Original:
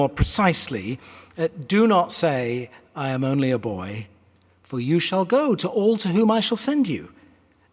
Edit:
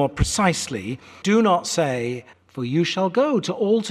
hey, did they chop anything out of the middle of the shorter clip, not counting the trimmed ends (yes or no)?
yes